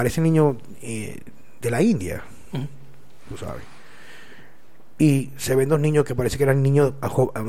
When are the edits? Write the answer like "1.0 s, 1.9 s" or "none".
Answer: none